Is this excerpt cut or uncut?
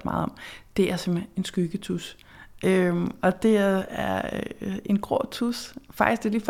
uncut